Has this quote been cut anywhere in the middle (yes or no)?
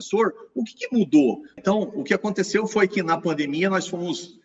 yes